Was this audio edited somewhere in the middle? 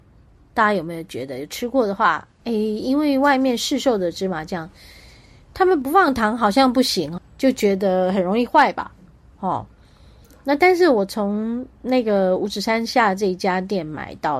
yes; 1 cut; at 7.2 s

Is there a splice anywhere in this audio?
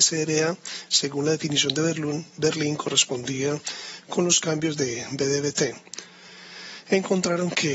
no; 0 cuts

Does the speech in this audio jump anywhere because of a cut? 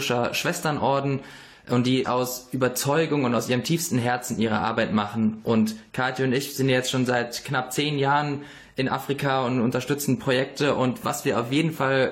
yes; 1 cut; at 2.0 s

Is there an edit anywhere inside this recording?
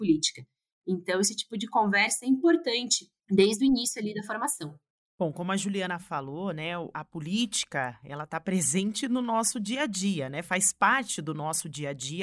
no; 0 cuts

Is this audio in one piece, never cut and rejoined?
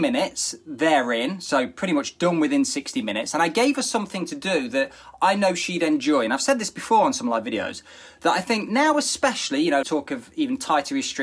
no; 1 cut; at 9.8 s

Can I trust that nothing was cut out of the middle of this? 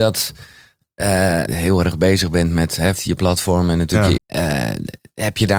no; 3 cuts; at 1.5 s, 3.0 s, 4.2 s

